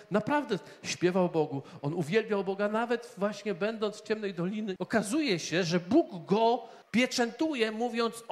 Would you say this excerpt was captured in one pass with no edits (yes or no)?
no